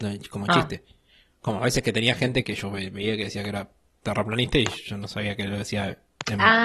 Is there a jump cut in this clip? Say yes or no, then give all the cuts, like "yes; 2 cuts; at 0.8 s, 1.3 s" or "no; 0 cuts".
yes; 1 cut; at 2.4 s